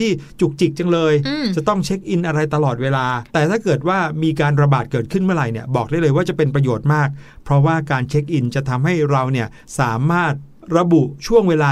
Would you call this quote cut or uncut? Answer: cut